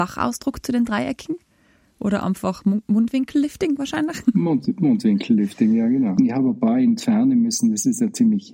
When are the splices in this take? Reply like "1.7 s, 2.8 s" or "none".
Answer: 6.2 s